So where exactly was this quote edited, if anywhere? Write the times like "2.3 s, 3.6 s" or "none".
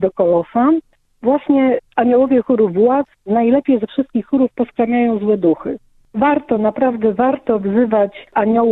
none